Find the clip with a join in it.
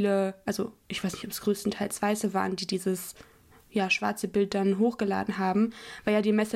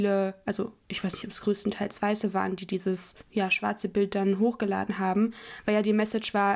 second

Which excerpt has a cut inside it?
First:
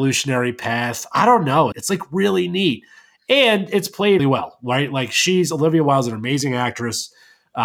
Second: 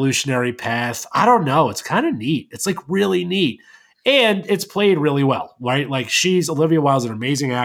first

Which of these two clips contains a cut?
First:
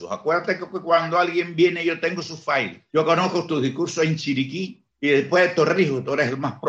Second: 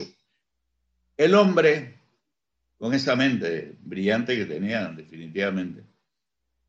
first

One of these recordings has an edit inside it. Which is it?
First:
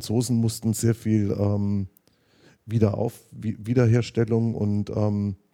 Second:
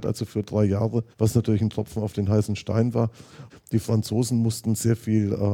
second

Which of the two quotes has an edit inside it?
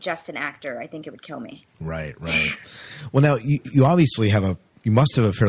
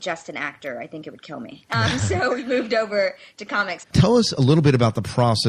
second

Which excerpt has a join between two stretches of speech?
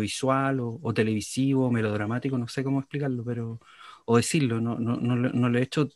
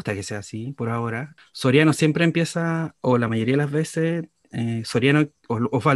second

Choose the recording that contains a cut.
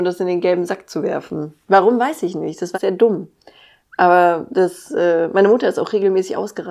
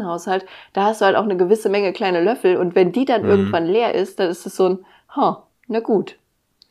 first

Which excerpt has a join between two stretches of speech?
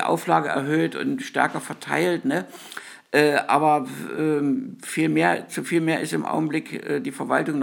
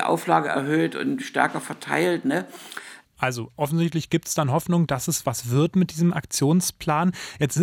second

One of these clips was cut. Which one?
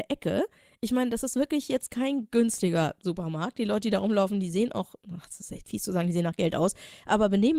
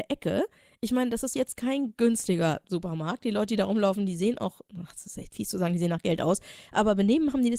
second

